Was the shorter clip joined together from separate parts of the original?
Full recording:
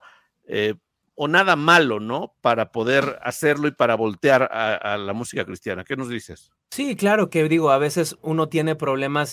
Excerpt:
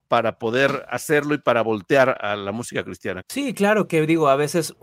yes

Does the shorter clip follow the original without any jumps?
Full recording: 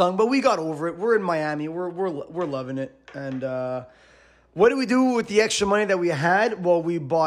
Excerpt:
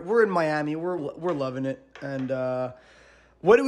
no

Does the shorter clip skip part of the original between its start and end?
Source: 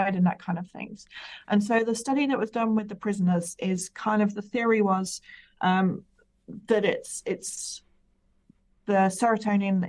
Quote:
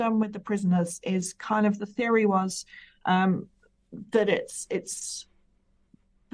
no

